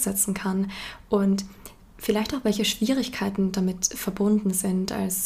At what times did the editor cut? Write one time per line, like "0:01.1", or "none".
none